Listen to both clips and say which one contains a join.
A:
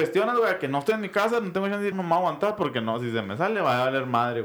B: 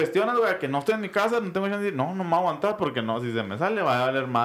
A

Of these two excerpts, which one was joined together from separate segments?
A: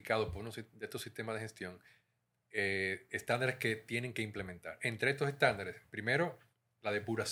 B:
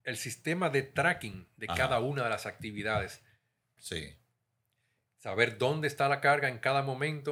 B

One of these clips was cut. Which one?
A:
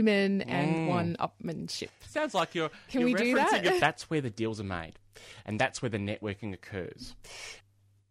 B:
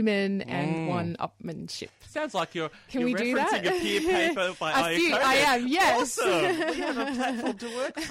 A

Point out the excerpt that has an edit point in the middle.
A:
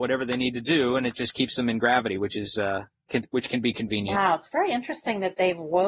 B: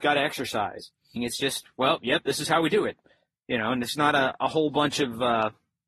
B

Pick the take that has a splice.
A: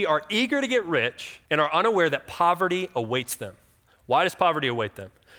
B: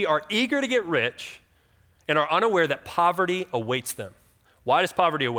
A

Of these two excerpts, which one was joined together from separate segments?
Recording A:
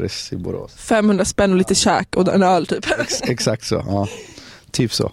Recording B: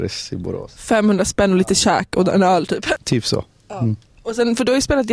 B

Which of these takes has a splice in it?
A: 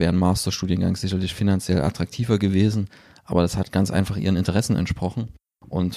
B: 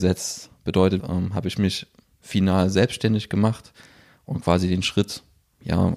B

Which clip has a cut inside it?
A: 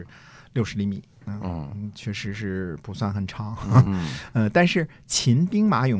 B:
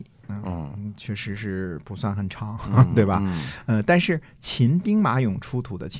A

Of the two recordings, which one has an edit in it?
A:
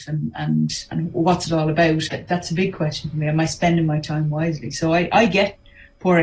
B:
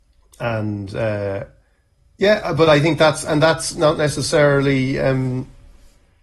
A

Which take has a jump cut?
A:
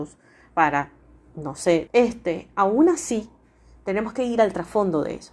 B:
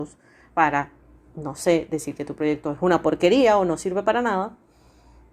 A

